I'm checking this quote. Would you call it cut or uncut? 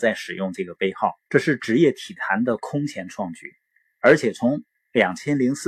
cut